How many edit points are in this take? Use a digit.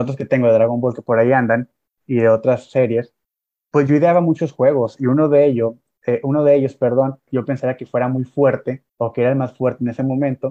2